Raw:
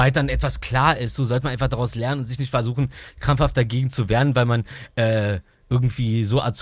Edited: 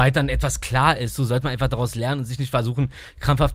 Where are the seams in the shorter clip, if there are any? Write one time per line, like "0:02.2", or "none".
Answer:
none